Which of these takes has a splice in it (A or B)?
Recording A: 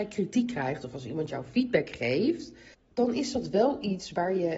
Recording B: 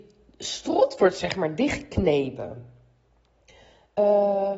A